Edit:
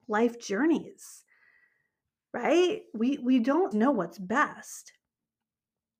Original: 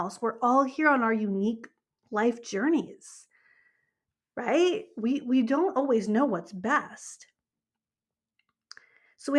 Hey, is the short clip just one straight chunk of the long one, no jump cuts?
no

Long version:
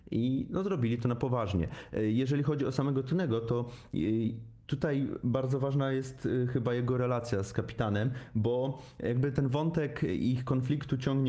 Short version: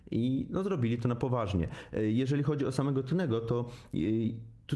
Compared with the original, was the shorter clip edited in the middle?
no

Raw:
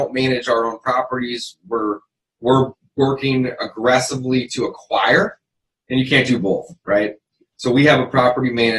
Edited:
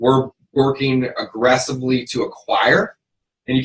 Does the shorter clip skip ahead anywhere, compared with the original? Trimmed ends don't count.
no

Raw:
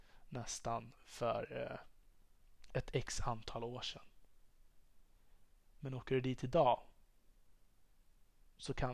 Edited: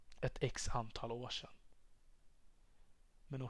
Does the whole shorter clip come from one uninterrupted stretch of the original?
yes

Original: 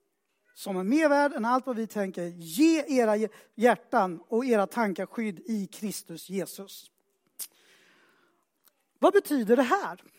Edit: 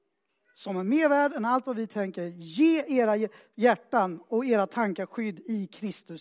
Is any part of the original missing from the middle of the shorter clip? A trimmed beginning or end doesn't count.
no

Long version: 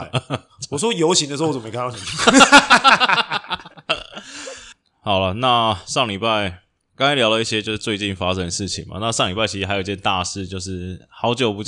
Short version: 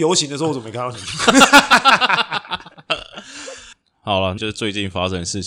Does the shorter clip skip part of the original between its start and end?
yes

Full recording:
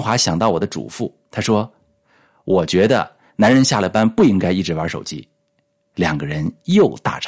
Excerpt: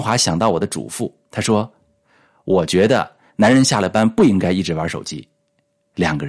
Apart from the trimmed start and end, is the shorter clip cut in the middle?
no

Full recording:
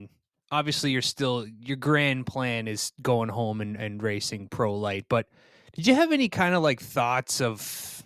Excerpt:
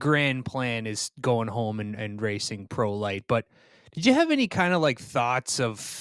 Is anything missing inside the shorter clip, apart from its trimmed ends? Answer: no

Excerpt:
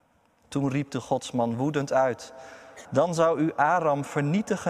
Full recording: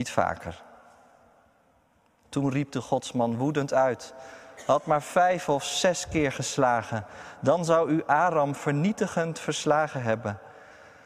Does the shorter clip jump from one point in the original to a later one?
yes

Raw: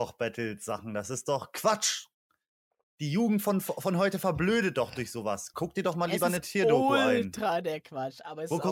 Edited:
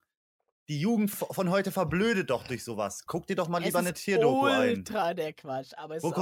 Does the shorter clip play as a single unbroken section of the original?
no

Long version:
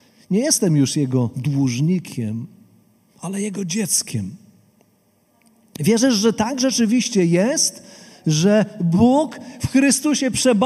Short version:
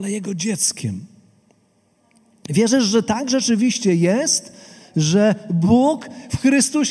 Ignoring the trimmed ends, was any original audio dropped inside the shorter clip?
no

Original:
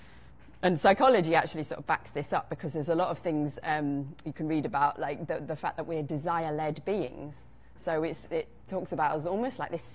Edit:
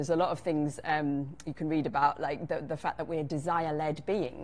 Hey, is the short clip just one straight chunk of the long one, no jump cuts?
yes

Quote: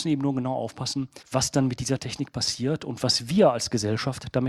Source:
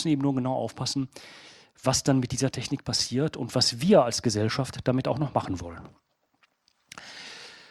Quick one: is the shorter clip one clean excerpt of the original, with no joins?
no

